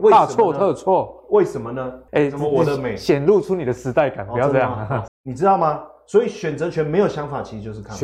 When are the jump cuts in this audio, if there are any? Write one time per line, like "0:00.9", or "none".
0:02.1
0:05.1